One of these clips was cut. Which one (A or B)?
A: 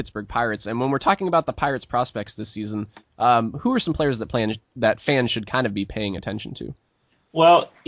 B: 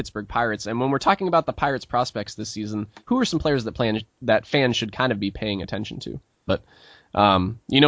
B